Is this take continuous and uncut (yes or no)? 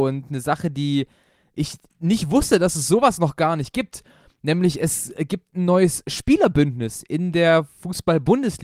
yes